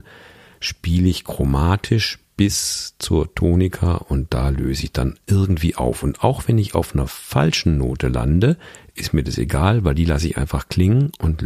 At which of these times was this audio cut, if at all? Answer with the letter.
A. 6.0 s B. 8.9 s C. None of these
C